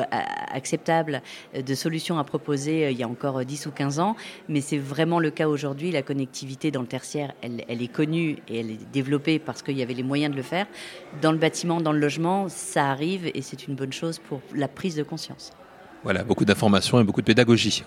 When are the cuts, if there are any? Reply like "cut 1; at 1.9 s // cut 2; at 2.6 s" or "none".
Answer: none